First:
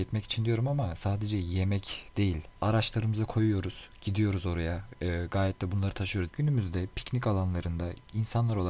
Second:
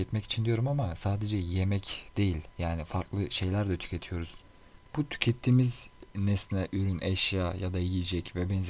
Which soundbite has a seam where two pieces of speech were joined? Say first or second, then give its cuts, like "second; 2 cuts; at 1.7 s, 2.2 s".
first; 2 cuts; at 2.5 s, 6.3 s